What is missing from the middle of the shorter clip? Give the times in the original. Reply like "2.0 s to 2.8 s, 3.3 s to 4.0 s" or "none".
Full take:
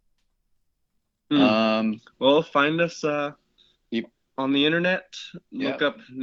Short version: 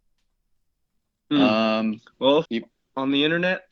2.4 s to 3.9 s